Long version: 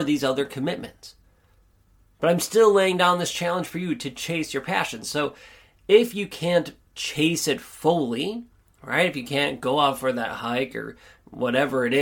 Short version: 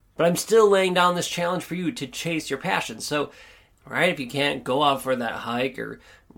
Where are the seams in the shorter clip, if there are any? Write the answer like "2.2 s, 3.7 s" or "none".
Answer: 3.7 s